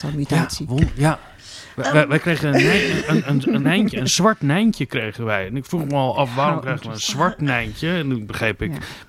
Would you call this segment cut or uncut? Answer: cut